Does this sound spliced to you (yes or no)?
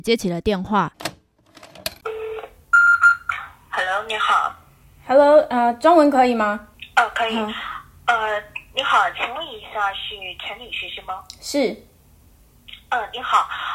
no